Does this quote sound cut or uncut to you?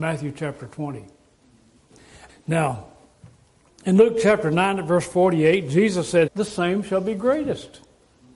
cut